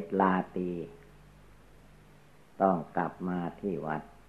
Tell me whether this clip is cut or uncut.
uncut